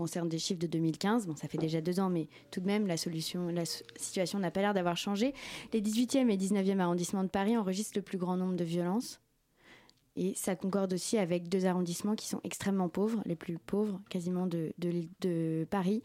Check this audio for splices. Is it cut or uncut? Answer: uncut